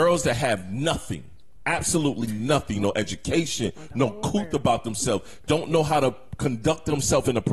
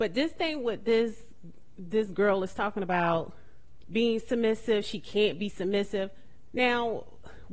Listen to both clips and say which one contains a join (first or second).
second